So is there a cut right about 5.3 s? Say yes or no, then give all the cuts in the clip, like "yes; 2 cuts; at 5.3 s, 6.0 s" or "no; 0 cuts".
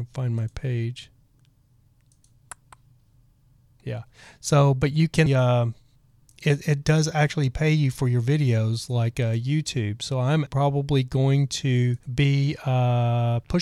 yes; 3 cuts; at 5.3 s, 10.5 s, 12.0 s